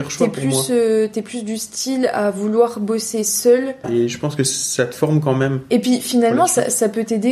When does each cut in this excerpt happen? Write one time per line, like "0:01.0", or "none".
0:03.8

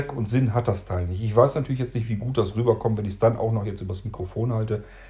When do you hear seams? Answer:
none

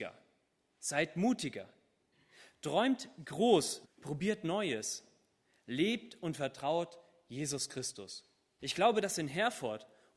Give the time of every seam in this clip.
0:03.8
0:08.6

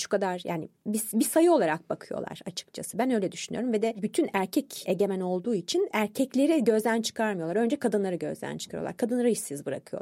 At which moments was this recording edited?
none

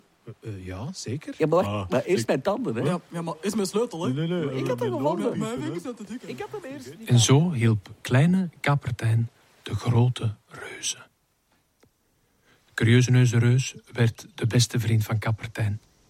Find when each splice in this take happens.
none

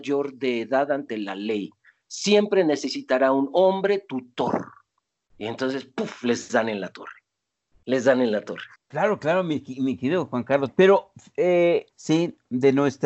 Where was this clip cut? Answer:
0:08.7
0:10.7
0:11.9

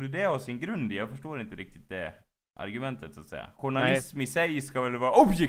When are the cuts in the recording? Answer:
none

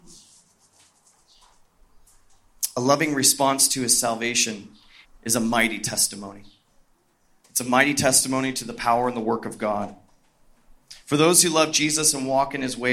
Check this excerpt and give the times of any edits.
0:05.0

